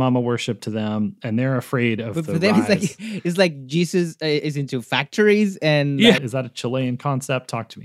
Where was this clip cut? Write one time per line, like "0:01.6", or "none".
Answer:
0:06.2